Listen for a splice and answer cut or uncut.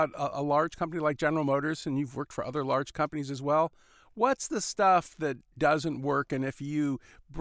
uncut